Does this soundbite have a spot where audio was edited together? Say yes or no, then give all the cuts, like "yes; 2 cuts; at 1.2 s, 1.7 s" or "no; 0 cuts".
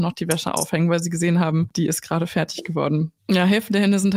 yes; 1 cut; at 3.2 s